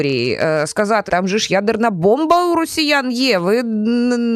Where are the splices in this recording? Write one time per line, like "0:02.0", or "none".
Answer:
0:01.1